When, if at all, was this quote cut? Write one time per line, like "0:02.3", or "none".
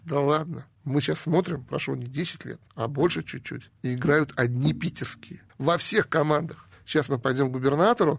0:06.7